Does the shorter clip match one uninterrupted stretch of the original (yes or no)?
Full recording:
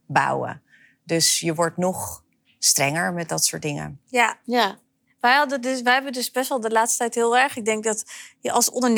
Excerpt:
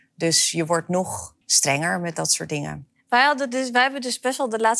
no